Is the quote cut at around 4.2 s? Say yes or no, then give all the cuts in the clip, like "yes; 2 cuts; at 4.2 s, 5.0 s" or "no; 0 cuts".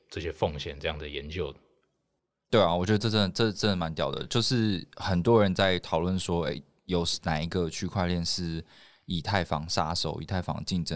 no; 0 cuts